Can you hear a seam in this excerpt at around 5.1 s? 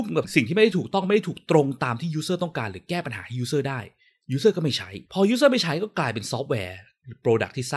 yes; 1 cut; at 5.1 s

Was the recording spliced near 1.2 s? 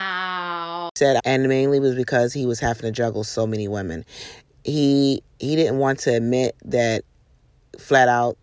yes; 1 cut; at 1.2 s

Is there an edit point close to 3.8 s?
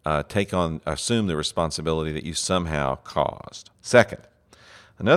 yes; 1 cut; at 3.8 s

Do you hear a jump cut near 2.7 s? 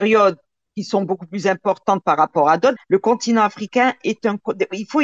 yes; 1 cut; at 2.7 s

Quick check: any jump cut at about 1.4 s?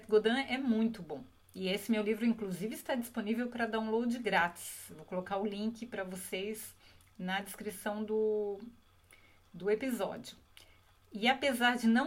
yes; 1 cut; at 1.4 s

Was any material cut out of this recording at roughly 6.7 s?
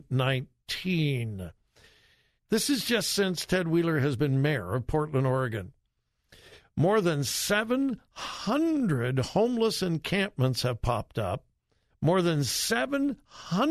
no; 2 cuts; at 2.4 s, 11.9 s

